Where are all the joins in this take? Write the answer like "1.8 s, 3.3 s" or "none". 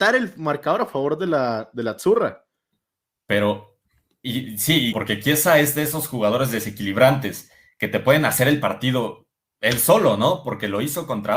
4.9 s